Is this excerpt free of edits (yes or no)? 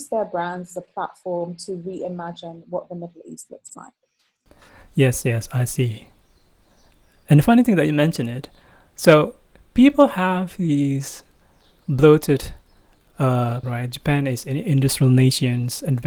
no